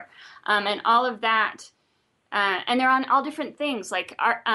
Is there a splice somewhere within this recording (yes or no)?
no